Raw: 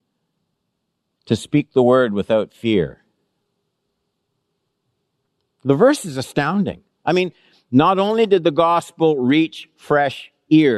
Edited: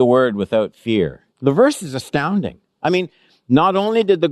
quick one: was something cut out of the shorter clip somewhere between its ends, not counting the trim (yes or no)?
yes